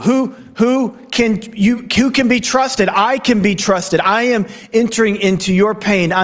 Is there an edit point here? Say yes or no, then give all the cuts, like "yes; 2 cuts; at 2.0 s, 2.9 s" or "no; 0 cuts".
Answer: no; 0 cuts